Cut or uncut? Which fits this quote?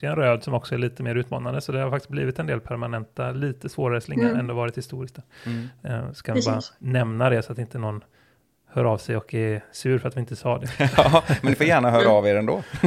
uncut